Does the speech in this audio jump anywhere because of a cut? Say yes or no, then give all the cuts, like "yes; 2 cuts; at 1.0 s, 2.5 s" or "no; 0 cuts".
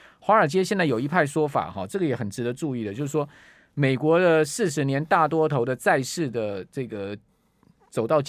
no; 0 cuts